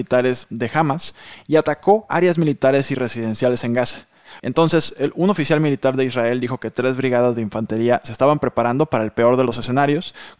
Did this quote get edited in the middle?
yes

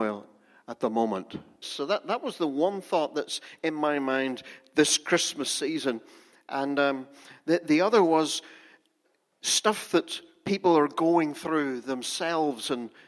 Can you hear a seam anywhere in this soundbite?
yes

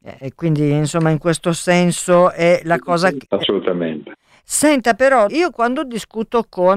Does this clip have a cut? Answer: yes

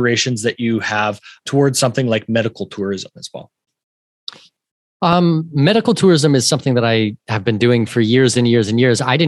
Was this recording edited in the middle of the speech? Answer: no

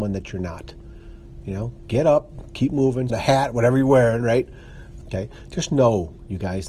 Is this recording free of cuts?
no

